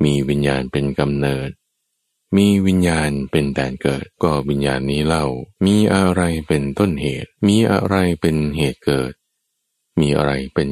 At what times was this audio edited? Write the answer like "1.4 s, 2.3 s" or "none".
4.1 s, 5.5 s, 7.4 s